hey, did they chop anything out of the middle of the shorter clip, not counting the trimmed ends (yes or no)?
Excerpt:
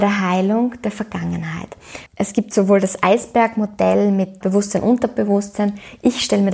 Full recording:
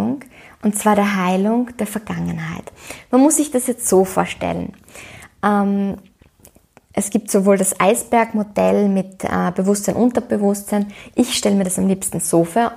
yes